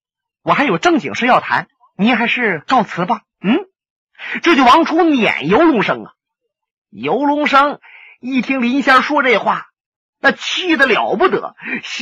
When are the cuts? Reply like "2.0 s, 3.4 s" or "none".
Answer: none